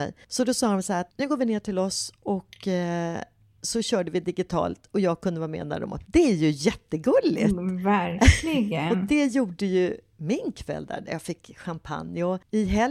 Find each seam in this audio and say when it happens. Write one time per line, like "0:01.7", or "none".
none